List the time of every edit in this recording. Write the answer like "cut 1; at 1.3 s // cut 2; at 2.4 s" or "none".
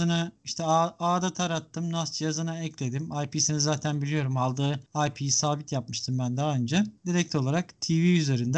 cut 1; at 7.0 s